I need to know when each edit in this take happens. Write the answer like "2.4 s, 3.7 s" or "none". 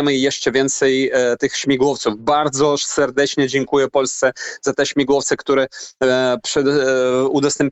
none

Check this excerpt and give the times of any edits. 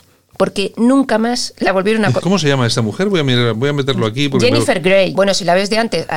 2.2 s, 5.1 s

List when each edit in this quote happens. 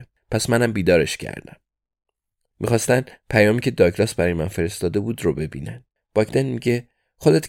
2.5 s, 6.0 s

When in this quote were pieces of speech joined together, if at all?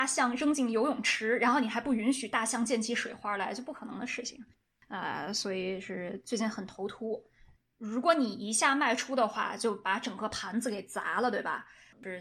7.6 s

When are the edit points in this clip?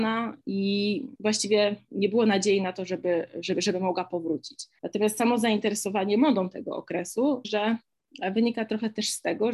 4.8 s, 7.4 s

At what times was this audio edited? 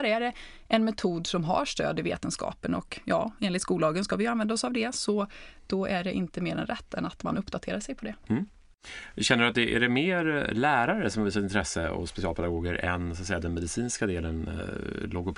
none

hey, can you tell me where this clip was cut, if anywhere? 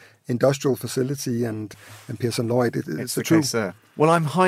none

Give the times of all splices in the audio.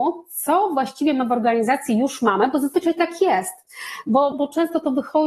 4.3 s

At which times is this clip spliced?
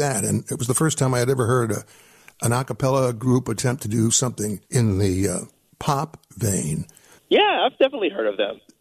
4.6 s, 7.2 s

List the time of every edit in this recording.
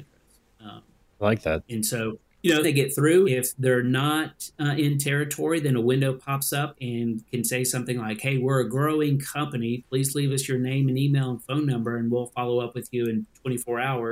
2.6 s

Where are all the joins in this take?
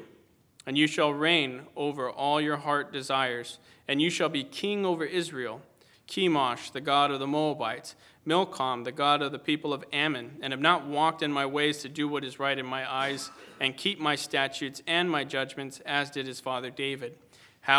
5.9 s

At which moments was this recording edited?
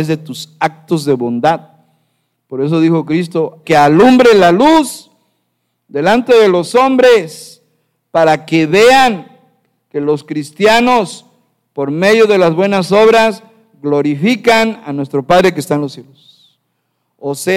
3.6 s

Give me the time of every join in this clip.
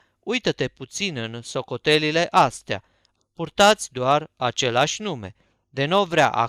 3.2 s

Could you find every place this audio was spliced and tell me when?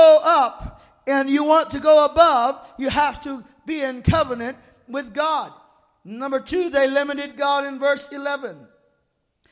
none

